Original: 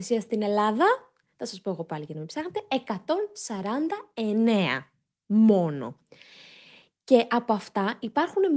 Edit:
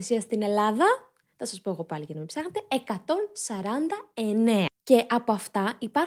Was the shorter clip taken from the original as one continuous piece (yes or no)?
no